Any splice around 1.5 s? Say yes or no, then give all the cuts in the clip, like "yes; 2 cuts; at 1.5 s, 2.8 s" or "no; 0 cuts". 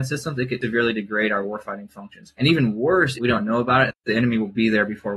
no; 1 cut; at 3.1 s